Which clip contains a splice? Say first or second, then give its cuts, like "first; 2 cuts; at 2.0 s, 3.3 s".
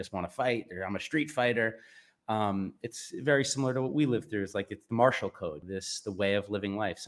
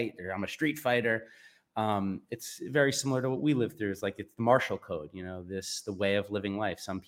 first; 1 cut; at 5.6 s